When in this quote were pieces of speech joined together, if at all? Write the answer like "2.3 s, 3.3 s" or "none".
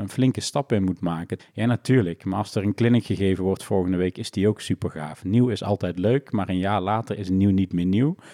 1.4 s